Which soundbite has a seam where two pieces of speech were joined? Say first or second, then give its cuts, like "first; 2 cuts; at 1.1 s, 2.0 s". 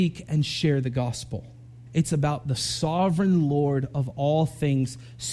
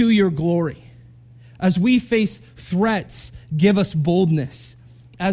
first; 1 cut; at 1.9 s